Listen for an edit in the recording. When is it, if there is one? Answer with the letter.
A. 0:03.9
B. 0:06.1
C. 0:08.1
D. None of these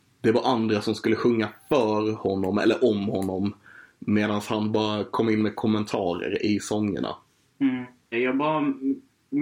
C